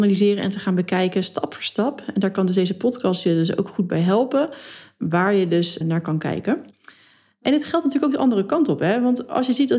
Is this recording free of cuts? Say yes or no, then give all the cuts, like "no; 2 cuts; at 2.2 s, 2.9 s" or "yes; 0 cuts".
no; 1 cut; at 5.8 s